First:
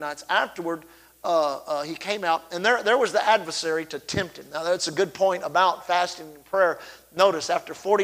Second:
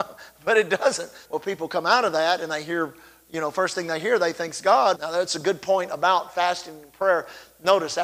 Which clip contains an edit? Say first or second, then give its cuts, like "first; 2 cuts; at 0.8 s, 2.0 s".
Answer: second; 2 cuts; at 1.2 s, 5.0 s